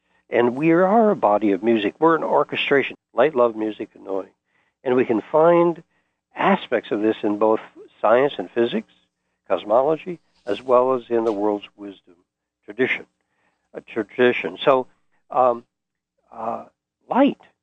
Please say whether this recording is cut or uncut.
cut